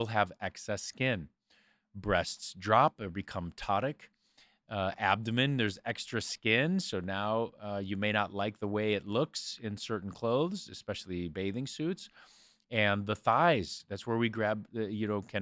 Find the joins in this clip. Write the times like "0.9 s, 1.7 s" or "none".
none